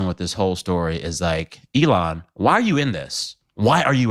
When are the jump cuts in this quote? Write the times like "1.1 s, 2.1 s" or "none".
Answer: none

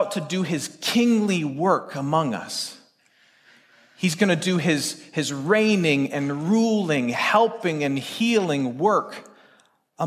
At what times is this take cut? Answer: none

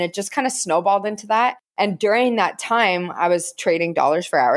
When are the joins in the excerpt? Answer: none

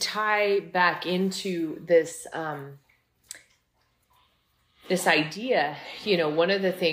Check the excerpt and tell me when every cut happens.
none

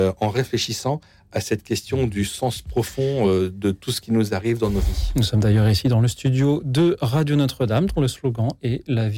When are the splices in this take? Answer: none

